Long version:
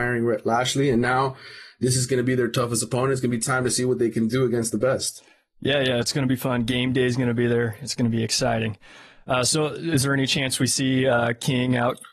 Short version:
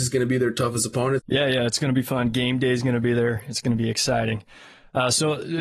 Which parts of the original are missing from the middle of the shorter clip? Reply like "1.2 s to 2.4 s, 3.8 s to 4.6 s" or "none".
3.1 s to 5.5 s